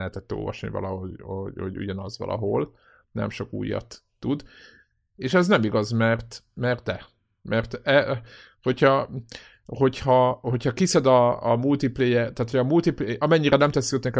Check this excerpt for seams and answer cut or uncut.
uncut